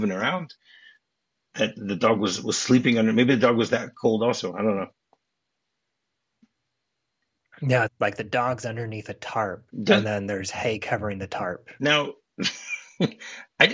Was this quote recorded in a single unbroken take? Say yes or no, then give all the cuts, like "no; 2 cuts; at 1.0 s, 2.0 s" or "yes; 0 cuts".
no; 3 cuts; at 7.8 s, 9.7 s, 11.8 s